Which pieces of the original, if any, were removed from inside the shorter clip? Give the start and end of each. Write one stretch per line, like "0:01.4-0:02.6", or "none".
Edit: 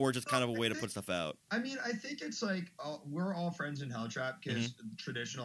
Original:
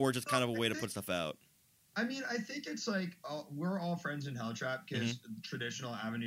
0:01.4-0:01.9